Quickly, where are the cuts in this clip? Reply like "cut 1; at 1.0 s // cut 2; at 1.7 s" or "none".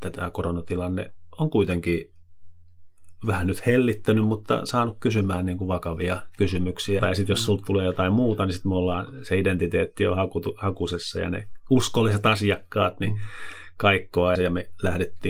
cut 1; at 7.0 s // cut 2; at 14.4 s

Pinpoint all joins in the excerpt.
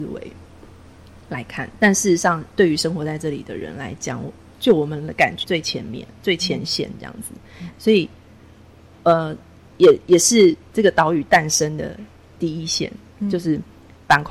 cut 1; at 5.4 s // cut 2; at 7.7 s

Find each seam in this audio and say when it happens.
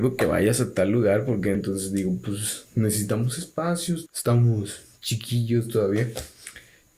cut 1; at 1.5 s // cut 2; at 4.1 s

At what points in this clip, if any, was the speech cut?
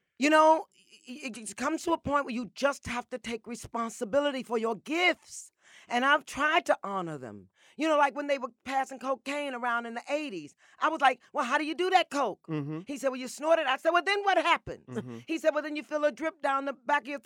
none

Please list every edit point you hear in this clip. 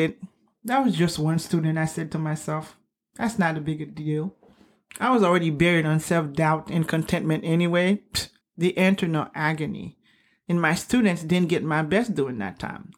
cut 1; at 8.4 s

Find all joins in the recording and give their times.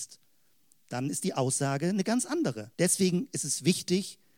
cut 1; at 2.7 s

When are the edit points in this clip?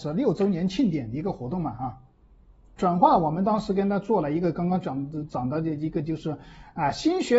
cut 1; at 2.8 s

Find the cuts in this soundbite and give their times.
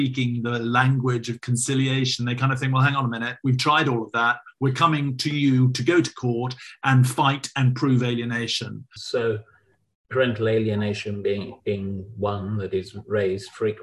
cut 1; at 9.0 s

